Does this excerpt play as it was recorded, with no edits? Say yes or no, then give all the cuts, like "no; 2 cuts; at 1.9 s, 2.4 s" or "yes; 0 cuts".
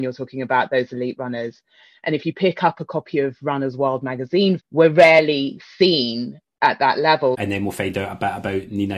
no; 2 cuts; at 4.6 s, 7.3 s